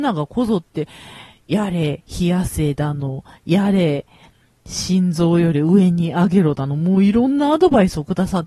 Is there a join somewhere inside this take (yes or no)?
no